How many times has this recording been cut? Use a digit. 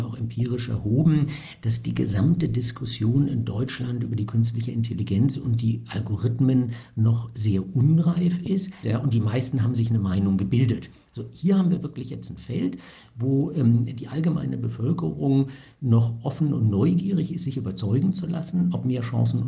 1